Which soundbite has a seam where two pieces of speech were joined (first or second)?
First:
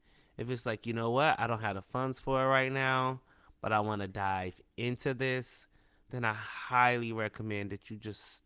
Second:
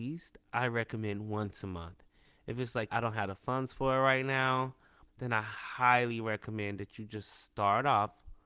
second